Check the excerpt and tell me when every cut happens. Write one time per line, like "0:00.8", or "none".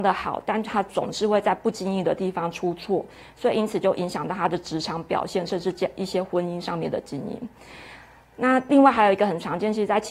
none

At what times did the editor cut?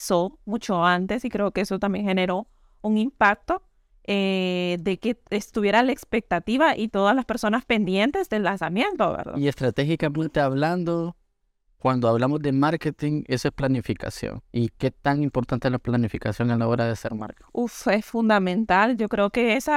none

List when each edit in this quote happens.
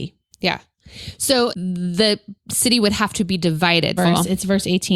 0:01.5
0:04.0

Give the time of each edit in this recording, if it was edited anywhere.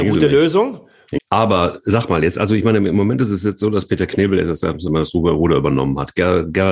0:01.2

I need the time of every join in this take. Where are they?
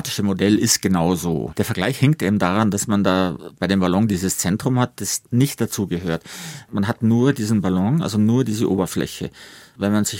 0:01.5

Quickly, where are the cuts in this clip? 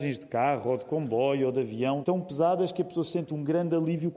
0:02.0

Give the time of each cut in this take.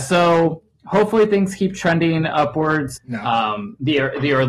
0:03.0

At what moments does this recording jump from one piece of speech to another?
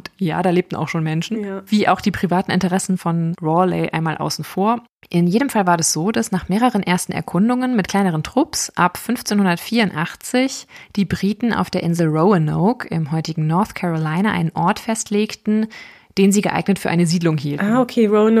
none

